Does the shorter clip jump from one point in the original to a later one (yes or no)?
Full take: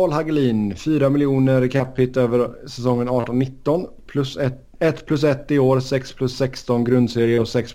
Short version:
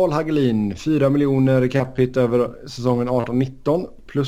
no